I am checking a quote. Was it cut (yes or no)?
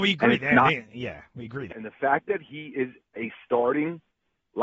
yes